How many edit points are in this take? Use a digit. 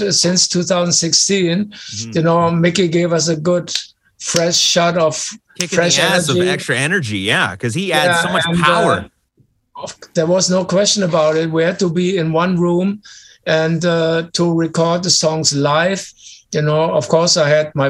0